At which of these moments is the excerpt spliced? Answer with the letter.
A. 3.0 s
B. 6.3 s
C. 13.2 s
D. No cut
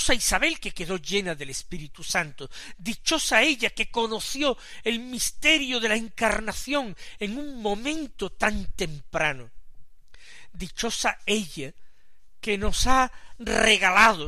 D